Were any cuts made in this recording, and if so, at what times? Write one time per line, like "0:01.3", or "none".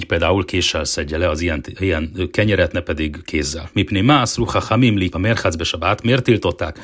0:03.7
0:05.1